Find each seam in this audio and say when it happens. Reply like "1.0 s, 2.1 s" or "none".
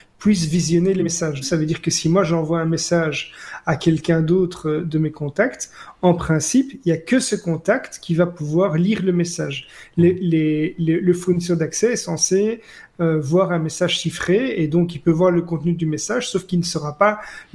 1.4 s